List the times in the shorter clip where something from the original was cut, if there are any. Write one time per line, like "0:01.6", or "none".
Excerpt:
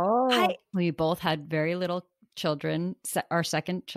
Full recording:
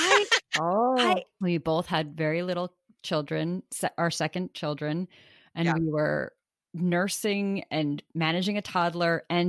none